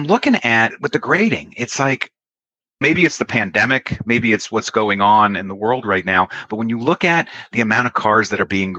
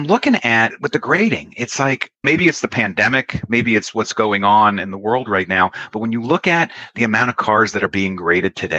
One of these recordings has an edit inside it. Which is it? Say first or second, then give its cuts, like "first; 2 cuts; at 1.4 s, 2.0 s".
second; 1 cut; at 2.2 s